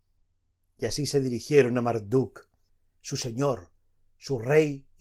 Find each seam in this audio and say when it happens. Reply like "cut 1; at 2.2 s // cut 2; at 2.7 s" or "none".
none